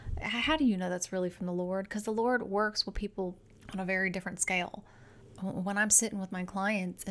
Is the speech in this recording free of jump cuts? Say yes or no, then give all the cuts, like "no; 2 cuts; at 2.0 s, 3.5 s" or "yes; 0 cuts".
yes; 0 cuts